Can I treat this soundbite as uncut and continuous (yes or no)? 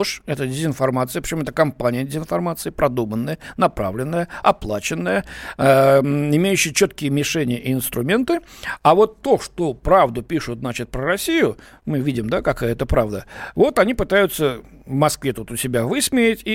yes